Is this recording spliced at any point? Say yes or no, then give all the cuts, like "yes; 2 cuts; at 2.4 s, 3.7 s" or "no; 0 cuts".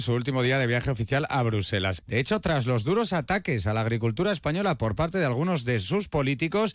yes; 1 cut; at 2.0 s